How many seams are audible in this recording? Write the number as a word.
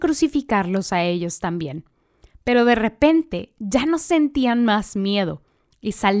zero